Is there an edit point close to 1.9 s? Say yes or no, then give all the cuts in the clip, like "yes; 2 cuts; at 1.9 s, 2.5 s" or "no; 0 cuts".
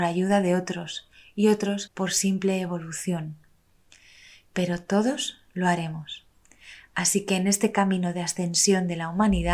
yes; 1 cut; at 1.9 s